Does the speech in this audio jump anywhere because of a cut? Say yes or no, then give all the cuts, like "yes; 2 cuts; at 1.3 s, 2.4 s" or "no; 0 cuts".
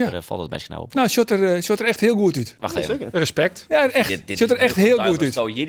no; 0 cuts